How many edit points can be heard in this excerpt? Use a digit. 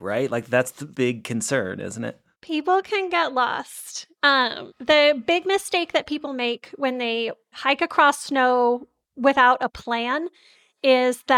0